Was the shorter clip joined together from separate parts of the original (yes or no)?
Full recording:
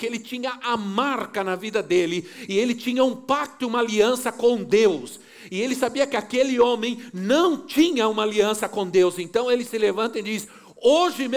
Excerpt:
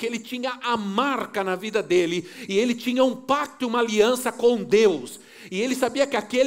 no